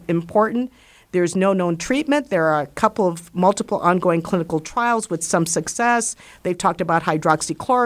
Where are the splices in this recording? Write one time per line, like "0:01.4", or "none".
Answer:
none

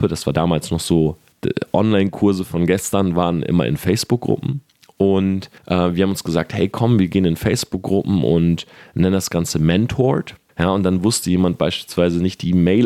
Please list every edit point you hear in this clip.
0:05.6
0:10.5

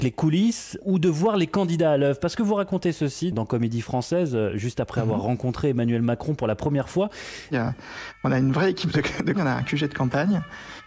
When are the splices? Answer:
0:07.5
0:09.3

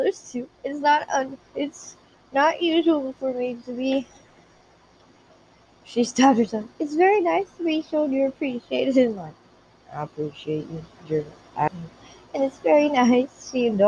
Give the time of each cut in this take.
0:11.7

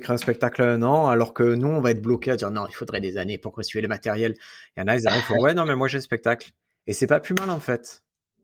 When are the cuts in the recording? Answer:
none

